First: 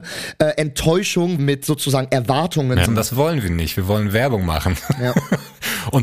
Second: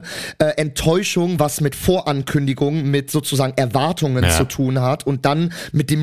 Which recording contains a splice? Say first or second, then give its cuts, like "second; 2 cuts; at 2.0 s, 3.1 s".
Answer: first; 2 cuts; at 1.4 s, 2.9 s